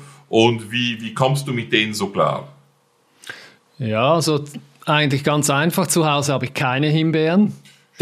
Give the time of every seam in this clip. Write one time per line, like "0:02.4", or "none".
none